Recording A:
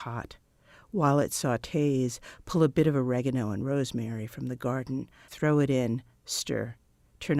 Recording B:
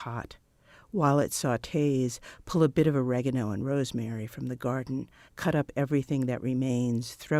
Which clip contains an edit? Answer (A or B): A